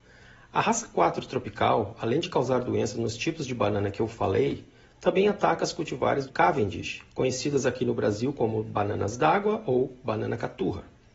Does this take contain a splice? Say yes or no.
yes